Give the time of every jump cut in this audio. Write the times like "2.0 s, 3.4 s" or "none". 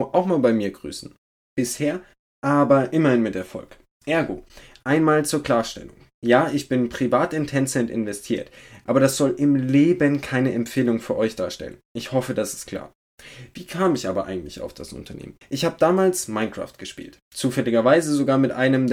15.4 s